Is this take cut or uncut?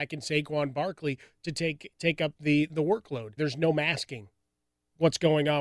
cut